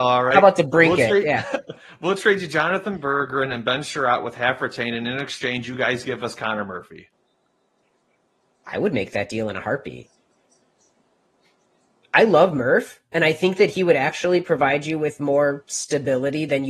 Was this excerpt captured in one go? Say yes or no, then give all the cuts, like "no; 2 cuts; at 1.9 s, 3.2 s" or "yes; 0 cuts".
yes; 0 cuts